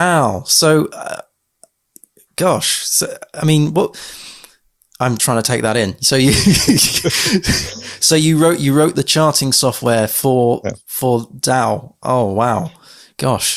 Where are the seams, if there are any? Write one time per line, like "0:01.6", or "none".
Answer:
0:05.2